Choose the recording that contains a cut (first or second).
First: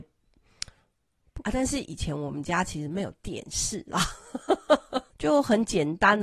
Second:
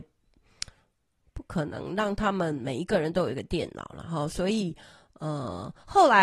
first